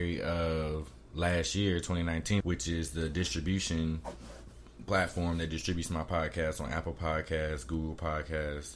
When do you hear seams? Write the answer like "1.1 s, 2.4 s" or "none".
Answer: 2.4 s